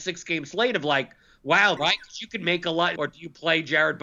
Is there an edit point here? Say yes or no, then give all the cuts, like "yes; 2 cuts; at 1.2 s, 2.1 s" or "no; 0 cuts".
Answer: yes; 2 cuts; at 1.8 s, 3.0 s